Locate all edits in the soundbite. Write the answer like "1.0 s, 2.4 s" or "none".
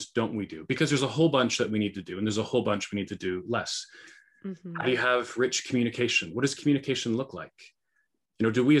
none